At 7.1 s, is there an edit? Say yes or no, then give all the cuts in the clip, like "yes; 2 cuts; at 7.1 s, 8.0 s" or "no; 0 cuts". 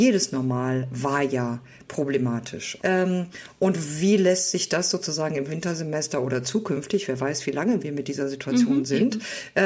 no; 1 cut; at 2.8 s